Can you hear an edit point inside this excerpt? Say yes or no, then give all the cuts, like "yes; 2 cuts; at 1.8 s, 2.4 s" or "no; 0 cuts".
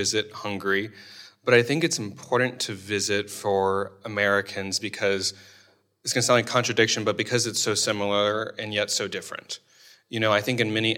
no; 0 cuts